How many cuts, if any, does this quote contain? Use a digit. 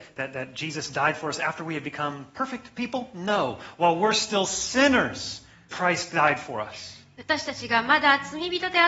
1